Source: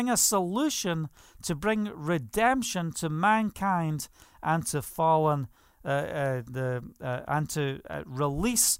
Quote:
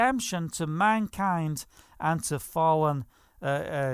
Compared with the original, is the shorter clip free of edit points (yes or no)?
yes